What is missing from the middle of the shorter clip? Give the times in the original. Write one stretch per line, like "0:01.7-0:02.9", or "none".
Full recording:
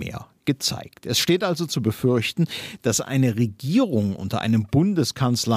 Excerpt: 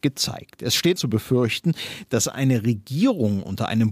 0:01.4-0:01.7